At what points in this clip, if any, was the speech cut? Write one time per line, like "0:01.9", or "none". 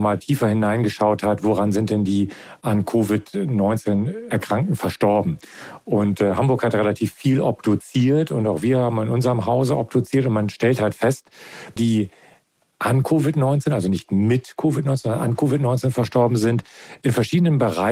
0:11.8